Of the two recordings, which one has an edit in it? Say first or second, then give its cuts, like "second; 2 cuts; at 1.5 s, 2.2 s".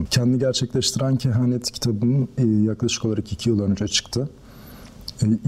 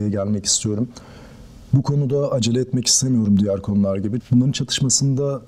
second; 1 cut; at 4.2 s